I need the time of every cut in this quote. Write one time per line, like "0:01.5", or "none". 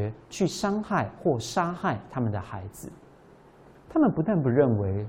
0:03.8